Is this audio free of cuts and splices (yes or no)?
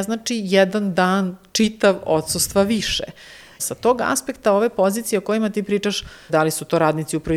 no